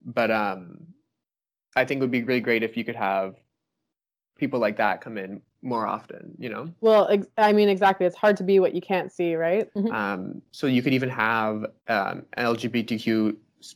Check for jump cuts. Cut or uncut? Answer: cut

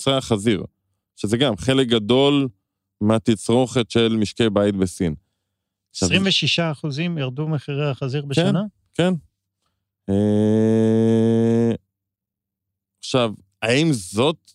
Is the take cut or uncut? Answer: uncut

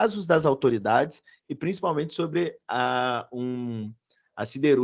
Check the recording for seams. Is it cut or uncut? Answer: uncut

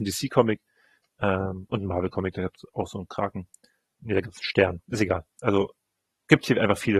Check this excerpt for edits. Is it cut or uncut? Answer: uncut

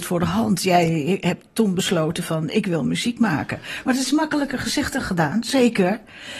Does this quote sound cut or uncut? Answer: uncut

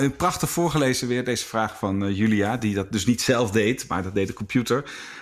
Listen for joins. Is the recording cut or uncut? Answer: uncut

